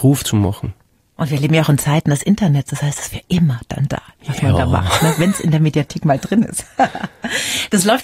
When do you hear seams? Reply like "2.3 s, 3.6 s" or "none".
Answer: none